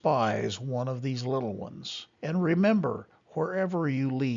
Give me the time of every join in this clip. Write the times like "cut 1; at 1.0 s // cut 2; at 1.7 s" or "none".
cut 1; at 2.1 s